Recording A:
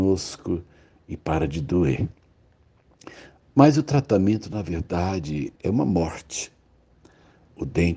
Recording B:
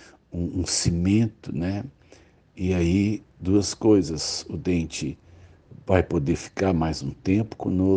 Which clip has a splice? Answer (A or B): A